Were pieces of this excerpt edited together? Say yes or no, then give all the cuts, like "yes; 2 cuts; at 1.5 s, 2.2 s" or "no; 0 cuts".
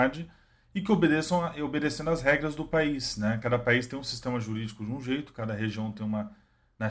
no; 0 cuts